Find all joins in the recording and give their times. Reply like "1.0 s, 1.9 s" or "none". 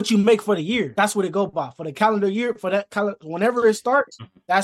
none